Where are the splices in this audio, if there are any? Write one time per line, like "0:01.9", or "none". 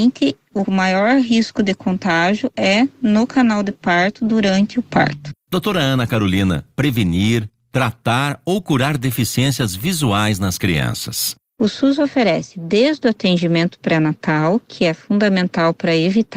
0:06.7